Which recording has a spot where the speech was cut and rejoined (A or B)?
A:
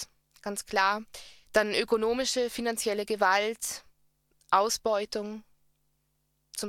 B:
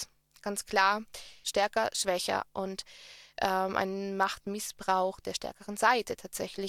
B